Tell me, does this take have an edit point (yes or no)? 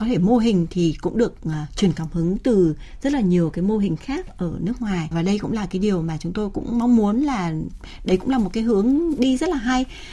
yes